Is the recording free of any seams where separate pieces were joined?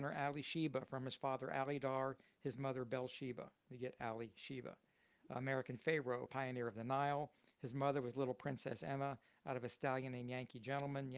no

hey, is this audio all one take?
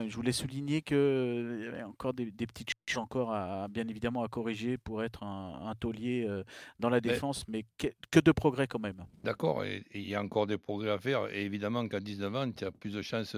yes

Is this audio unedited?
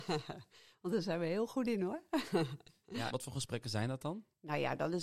no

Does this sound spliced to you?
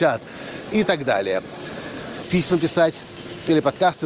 yes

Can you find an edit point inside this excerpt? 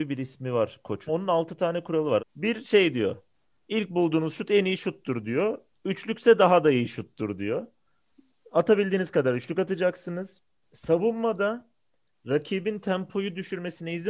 yes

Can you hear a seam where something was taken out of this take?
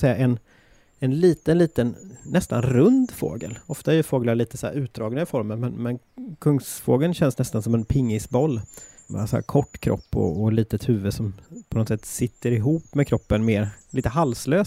no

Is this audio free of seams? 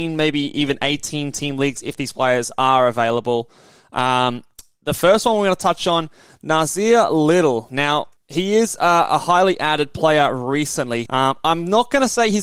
no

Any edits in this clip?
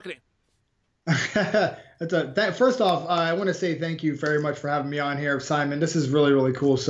no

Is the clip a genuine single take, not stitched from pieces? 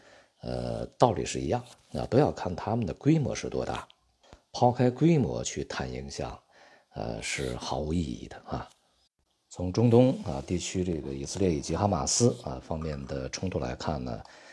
yes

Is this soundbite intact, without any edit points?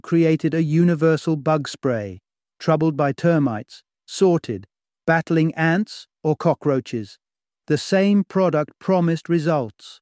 yes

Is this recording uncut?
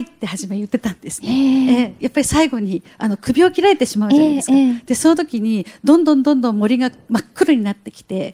yes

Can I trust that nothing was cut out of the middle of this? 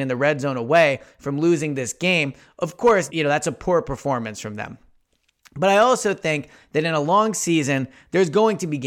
no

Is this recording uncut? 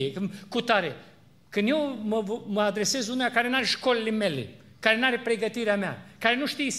yes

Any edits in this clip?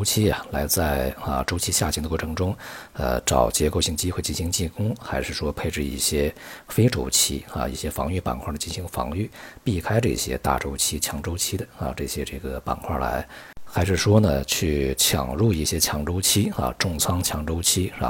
no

